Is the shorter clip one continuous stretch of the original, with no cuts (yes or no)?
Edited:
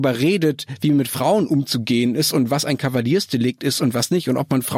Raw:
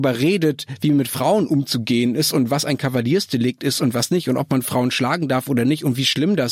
yes